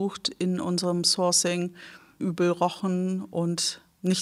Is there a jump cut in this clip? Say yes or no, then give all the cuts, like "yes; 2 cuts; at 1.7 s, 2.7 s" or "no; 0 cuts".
yes; 1 cut; at 2.2 s